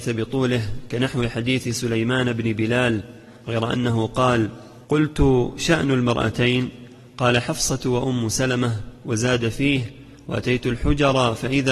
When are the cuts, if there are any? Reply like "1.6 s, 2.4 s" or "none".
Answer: 4.8 s